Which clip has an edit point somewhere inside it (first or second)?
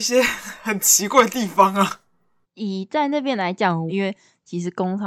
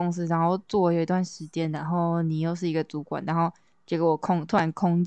first